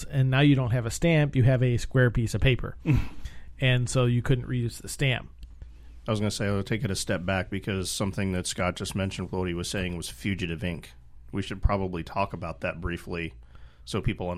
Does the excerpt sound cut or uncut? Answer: cut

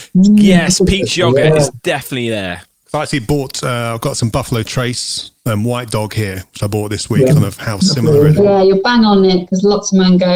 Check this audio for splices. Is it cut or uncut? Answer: cut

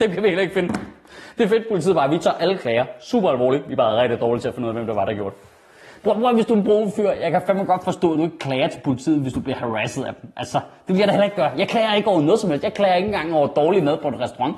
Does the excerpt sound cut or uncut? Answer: uncut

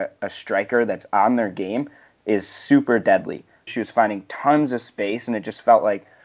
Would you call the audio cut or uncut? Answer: cut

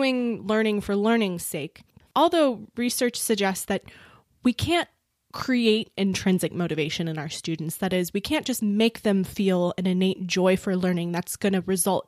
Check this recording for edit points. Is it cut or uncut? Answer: cut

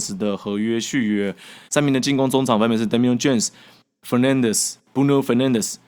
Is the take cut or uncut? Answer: cut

